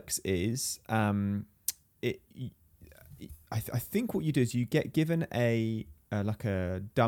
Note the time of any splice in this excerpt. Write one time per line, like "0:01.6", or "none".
0:02.3
0:06.0